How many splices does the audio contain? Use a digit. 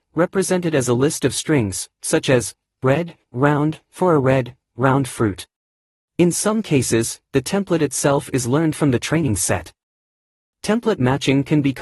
1